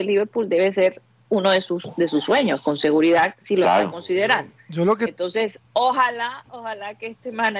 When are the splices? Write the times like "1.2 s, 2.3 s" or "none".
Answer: none